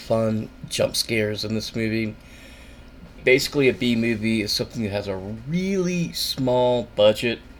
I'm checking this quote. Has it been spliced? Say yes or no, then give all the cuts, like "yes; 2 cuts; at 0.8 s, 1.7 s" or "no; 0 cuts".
yes; 1 cut; at 3.2 s